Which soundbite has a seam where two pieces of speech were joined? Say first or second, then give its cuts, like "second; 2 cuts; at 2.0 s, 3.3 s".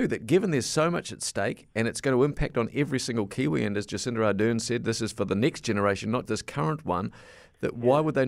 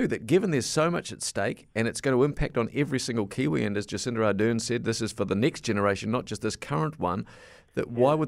first; 1 cut; at 6.3 s